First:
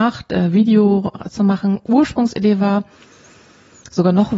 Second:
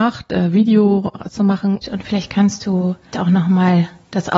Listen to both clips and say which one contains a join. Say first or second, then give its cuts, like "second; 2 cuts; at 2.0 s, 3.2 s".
second; 2 cuts; at 1.8 s, 3.1 s